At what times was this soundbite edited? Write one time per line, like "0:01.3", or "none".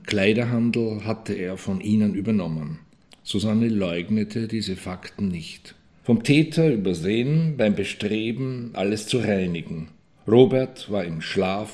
0:03.1
0:06.0